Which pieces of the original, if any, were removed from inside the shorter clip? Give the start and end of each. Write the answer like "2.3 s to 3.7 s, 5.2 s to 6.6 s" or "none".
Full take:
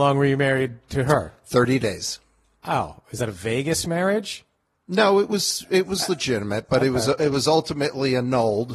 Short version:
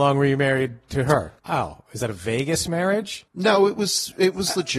1.4 s to 2.6 s, 4.5 s to 4.8 s